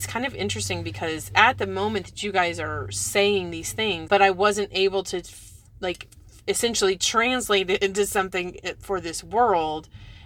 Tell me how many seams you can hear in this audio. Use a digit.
1